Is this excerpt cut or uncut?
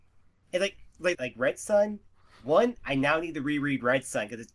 cut